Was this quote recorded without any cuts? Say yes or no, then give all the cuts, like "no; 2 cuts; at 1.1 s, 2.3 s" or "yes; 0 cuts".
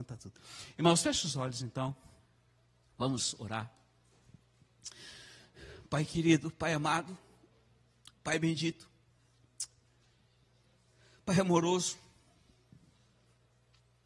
yes; 0 cuts